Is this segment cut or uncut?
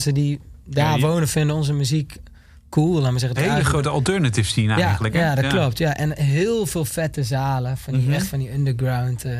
cut